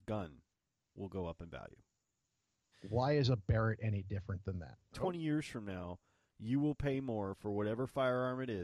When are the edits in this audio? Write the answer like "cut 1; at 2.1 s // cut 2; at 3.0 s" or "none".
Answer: cut 1; at 2.7 s // cut 2; at 4.9 s